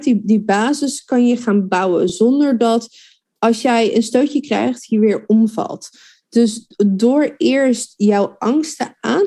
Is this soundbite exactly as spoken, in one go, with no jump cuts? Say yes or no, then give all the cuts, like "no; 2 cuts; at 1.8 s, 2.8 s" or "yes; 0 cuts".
yes; 0 cuts